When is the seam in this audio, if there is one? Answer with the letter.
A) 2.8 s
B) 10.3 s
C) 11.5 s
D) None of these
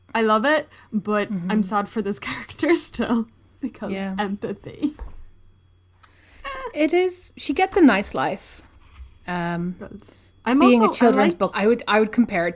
C